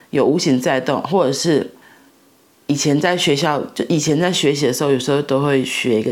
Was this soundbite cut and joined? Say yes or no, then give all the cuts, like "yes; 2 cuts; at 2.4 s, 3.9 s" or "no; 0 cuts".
yes; 1 cut; at 1.1 s